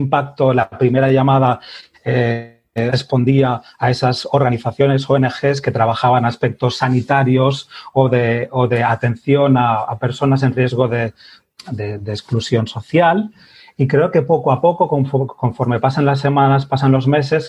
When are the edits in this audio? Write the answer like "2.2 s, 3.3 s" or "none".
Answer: none